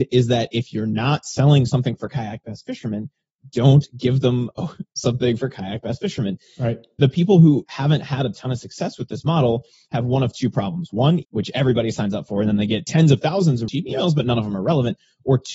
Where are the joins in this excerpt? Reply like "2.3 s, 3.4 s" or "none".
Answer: 11.2 s, 13.7 s